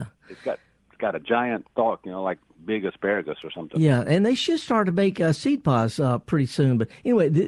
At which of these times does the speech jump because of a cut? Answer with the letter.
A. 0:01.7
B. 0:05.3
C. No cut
A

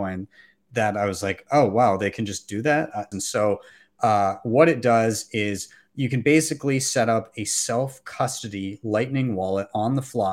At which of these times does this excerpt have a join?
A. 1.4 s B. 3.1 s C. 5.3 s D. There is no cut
B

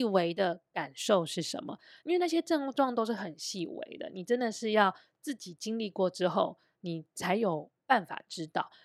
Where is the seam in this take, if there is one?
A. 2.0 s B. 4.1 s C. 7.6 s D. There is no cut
A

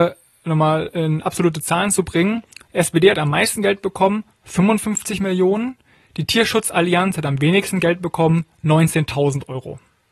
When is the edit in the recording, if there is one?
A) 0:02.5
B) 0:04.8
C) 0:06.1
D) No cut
D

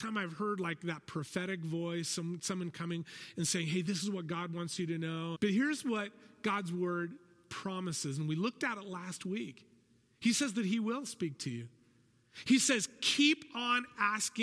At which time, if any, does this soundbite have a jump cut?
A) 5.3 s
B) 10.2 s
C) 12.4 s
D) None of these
A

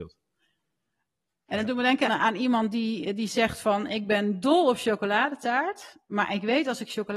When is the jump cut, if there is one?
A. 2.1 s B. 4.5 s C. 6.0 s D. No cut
A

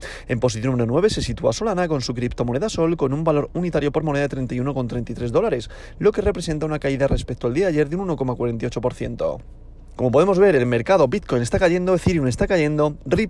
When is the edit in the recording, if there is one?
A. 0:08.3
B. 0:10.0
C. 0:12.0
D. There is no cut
B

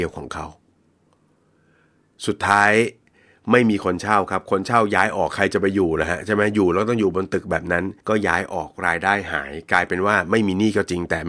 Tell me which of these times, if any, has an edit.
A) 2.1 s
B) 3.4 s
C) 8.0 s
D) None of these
C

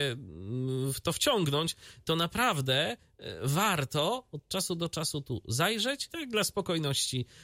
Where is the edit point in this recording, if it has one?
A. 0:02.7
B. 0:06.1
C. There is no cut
B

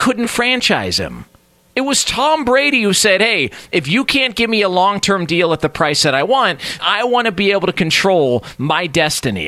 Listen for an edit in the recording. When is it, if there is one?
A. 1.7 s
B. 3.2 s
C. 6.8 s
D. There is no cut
C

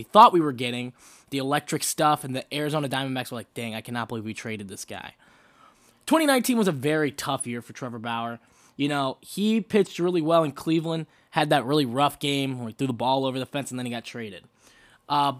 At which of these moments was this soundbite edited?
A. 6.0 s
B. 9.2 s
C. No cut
C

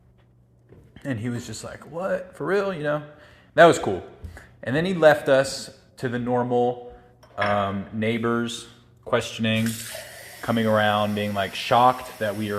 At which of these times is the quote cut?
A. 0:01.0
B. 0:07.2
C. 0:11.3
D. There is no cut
D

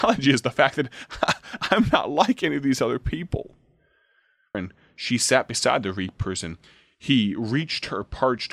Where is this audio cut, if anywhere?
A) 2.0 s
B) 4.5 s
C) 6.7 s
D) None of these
B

